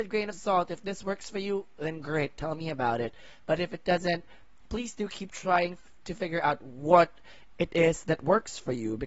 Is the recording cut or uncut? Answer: uncut